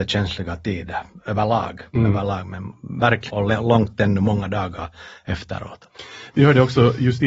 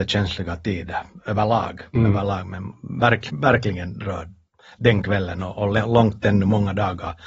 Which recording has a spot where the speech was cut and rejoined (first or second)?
first